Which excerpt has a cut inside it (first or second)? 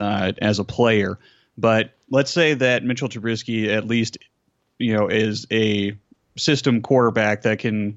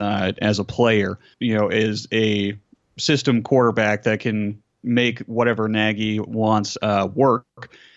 second